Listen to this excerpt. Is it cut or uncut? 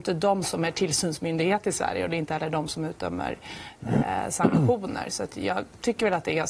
uncut